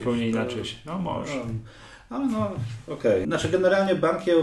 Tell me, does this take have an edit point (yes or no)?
yes